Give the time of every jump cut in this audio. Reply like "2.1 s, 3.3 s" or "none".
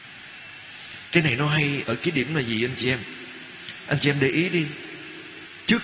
1.8 s